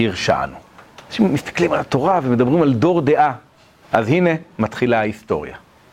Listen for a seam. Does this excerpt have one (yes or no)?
yes